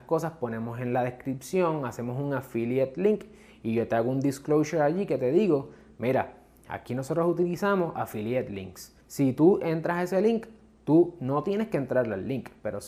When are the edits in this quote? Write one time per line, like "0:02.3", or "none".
0:09.0